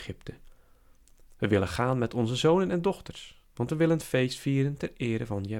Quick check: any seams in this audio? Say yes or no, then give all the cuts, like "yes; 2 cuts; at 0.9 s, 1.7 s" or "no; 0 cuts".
yes; 2 cuts; at 1.3 s, 3.4 s